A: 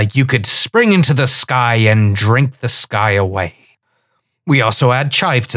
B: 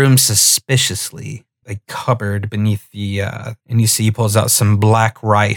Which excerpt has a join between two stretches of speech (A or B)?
B